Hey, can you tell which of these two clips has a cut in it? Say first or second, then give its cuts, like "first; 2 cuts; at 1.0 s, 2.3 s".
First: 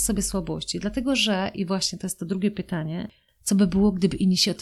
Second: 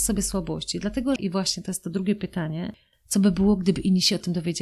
second; 1 cut; at 1.2 s